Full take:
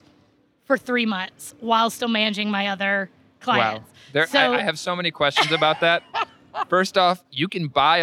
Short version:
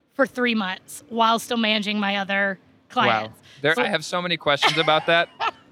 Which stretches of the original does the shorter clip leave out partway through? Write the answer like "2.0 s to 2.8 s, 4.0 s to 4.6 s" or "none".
4.3 s to 4.5 s